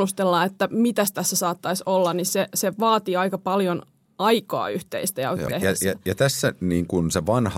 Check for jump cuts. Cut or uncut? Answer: cut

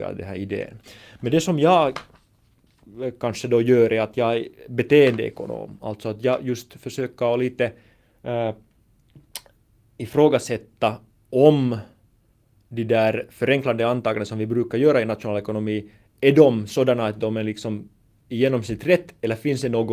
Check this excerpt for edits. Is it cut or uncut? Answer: uncut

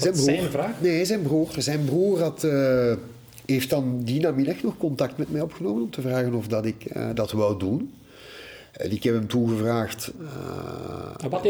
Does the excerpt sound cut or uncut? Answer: cut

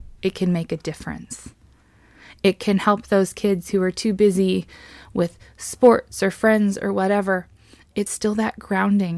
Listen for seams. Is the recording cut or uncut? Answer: uncut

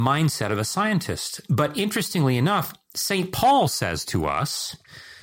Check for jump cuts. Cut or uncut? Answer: uncut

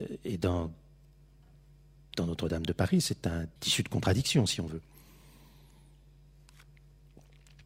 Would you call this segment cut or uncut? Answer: cut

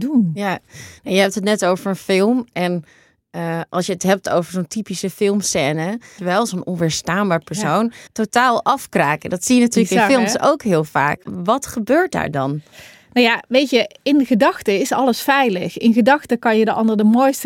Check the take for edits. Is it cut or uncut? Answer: cut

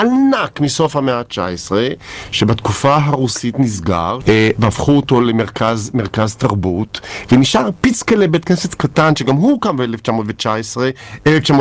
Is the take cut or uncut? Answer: cut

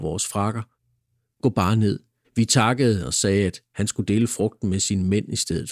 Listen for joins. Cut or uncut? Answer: cut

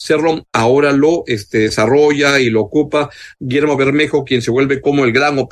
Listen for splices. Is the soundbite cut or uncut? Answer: uncut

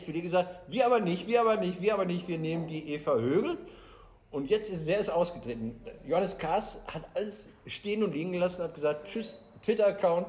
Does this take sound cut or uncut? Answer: uncut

